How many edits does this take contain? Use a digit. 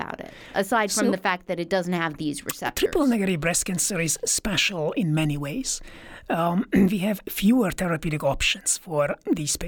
0